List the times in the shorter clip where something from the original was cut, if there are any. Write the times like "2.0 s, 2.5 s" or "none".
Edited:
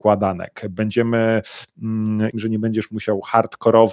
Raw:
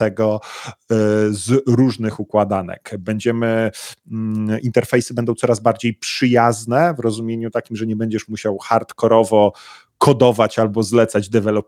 2.3 s